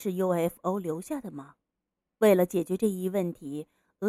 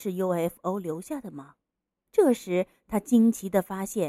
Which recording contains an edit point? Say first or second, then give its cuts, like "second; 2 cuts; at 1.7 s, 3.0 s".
second; 1 cut; at 2.1 s